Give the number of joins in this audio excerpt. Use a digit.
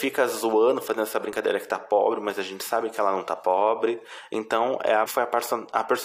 1